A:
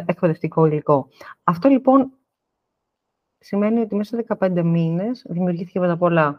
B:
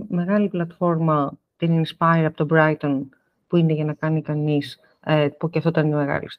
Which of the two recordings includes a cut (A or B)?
B